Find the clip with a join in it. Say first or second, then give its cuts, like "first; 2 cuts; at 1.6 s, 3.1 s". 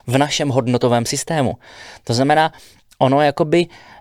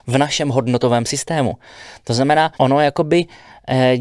second; 1 cut; at 2.6 s